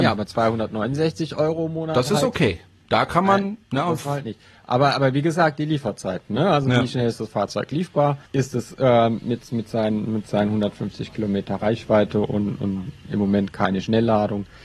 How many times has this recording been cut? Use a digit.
1